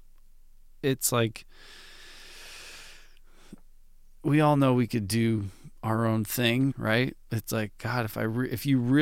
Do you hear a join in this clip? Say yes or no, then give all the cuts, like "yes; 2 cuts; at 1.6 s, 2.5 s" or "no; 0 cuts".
yes; 1 cut; at 6.7 s